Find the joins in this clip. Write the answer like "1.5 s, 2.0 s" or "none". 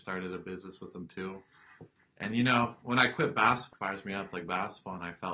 3.7 s